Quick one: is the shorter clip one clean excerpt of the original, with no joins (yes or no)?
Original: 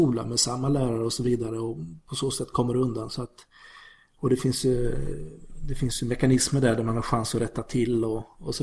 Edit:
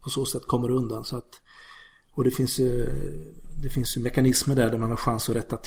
yes